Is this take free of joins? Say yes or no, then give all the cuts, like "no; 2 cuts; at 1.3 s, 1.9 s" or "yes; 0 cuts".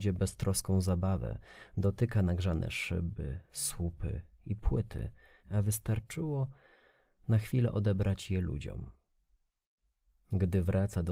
no; 1 cut; at 5.4 s